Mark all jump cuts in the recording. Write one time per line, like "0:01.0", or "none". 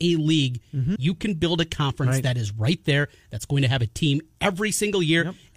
0:01.0

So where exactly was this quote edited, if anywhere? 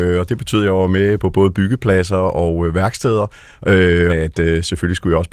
0:01.2
0:04.1

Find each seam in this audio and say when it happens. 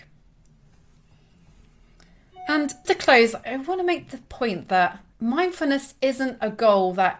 0:02.8
0:05.1

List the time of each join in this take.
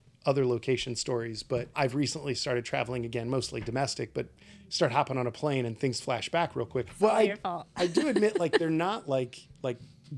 0:06.9

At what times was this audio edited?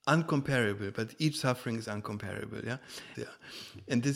0:03.1

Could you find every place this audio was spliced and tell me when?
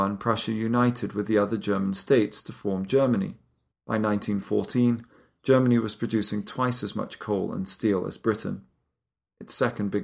0:03.7

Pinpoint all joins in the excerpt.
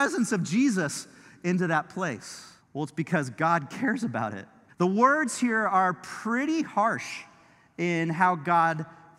0:02.6
0:04.7

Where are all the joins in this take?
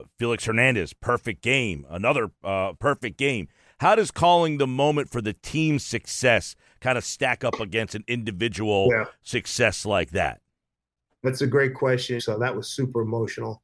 0:02.8
0:12.2

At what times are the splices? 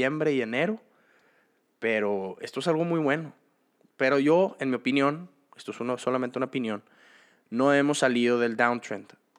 none

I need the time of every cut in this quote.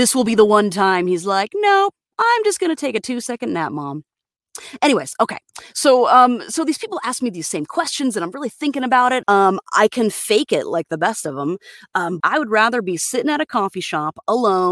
0:09.2
0:12.2

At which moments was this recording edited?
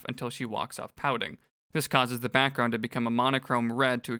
none

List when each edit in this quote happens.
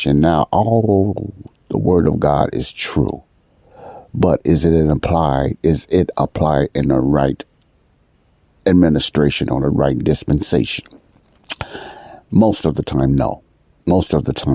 none

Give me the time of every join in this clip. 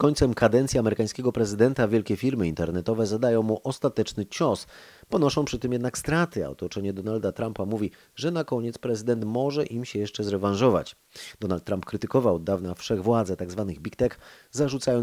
none

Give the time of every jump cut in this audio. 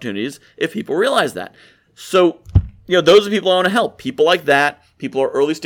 none

